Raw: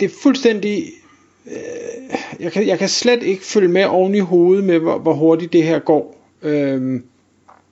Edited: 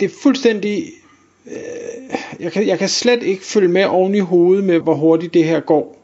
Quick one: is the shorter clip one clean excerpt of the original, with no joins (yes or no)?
no